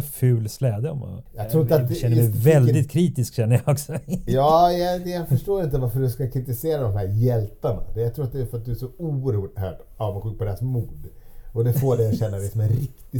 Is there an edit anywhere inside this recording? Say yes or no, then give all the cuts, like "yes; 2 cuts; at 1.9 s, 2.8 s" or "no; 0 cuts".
no; 0 cuts